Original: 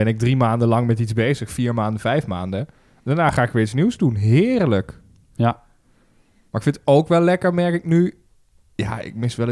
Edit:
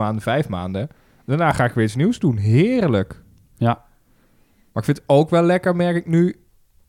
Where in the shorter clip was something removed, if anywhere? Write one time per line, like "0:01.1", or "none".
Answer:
none